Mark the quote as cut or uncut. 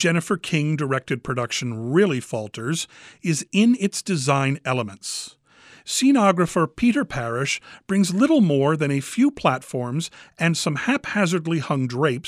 uncut